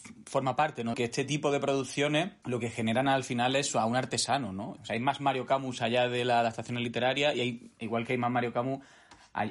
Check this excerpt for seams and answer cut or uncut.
cut